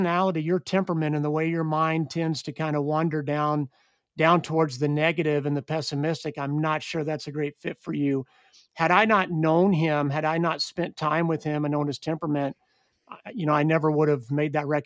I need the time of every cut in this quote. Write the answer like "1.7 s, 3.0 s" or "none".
none